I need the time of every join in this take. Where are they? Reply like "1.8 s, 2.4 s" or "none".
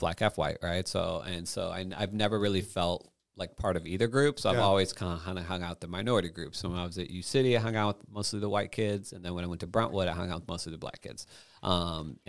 none